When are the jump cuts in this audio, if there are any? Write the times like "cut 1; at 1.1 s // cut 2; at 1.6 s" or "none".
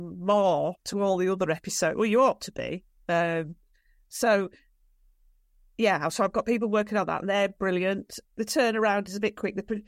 cut 1; at 8.2 s